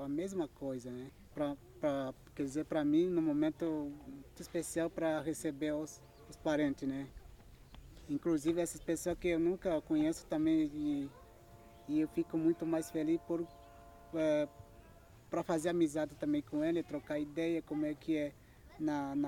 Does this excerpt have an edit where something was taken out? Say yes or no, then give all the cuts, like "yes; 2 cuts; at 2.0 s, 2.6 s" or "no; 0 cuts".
yes; 1 cut; at 4.4 s